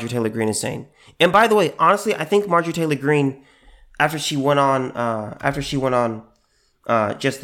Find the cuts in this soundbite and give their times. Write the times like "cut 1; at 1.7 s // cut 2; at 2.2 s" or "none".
none